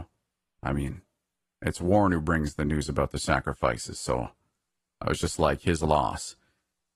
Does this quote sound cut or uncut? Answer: uncut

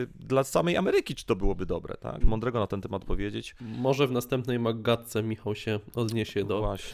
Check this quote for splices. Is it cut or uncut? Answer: cut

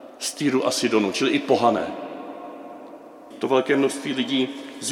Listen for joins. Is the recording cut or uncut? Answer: cut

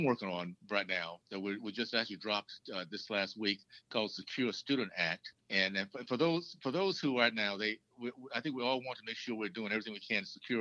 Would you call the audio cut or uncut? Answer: cut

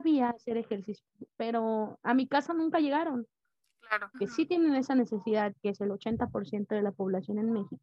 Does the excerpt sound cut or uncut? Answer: cut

